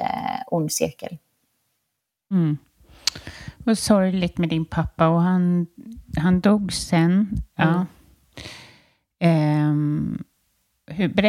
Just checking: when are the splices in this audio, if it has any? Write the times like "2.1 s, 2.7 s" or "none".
none